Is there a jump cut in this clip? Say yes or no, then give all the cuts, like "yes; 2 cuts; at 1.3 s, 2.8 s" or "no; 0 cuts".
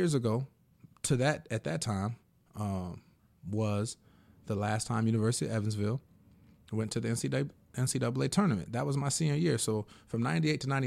no; 0 cuts